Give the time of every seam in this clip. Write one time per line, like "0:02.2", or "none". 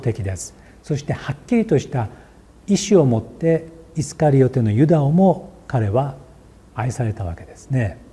none